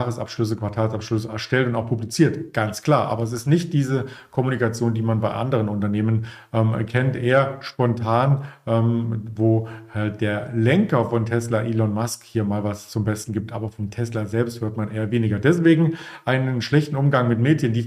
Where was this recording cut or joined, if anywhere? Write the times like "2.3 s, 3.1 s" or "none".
none